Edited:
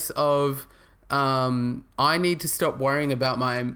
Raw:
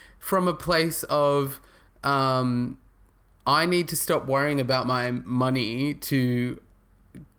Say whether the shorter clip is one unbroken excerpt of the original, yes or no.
no